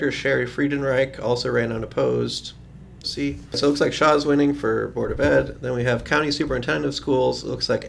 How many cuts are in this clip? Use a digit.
1